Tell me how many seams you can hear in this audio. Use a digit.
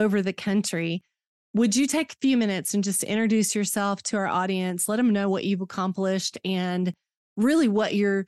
0